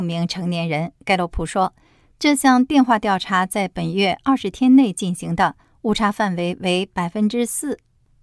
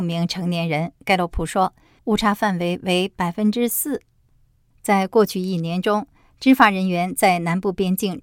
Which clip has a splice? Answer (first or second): second